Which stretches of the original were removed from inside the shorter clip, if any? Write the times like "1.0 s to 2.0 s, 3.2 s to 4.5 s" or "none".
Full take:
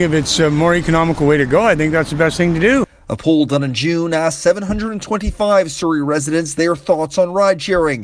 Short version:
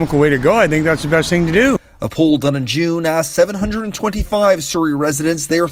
none

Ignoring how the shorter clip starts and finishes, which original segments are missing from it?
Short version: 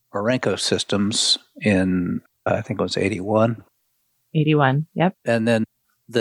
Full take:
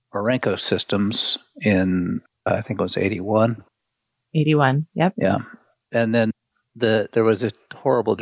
5.1 s to 5.8 s

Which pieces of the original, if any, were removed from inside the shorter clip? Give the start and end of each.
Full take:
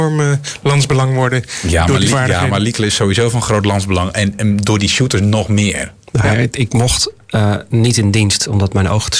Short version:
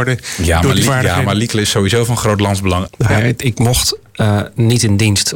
4.1 s to 6.0 s

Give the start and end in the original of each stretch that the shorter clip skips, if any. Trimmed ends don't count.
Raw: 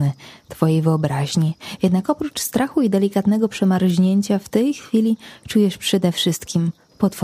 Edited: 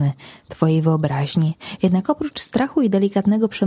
none

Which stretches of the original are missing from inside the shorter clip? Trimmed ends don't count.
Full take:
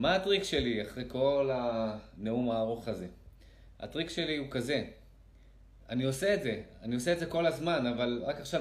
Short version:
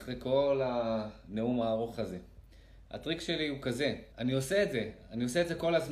5.0 s to 5.8 s

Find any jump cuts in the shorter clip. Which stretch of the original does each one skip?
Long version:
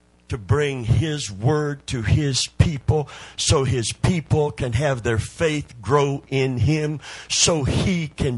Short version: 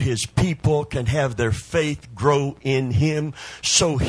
none

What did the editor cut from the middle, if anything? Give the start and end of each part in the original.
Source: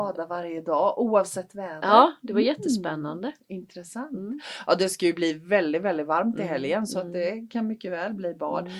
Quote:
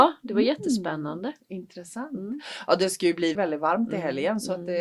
5.3 s to 5.8 s

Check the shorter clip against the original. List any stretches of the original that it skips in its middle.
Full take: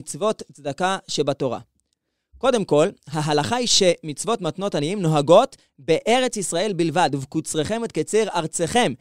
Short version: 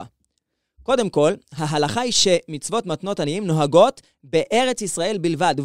none

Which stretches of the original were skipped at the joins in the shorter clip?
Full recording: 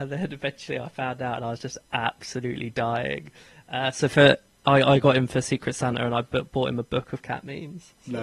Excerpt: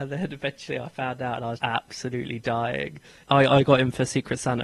1.6 s to 1.9 s, 3.5 s to 4.6 s

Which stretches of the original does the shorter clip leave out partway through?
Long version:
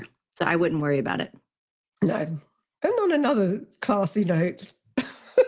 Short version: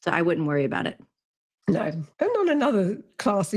2.5 s to 2.8 s

